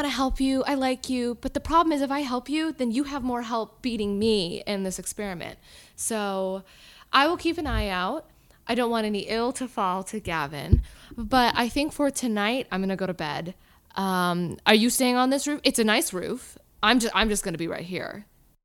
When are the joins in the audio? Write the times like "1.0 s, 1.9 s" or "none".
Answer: 12.7 s